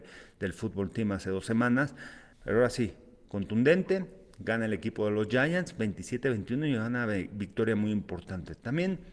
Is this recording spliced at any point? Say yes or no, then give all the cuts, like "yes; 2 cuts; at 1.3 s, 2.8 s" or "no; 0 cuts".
yes; 1 cut; at 2.3 s